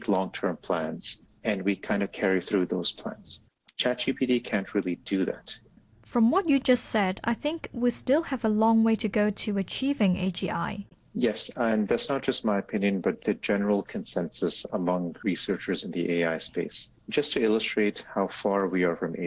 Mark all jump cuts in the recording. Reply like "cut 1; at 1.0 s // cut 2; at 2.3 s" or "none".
none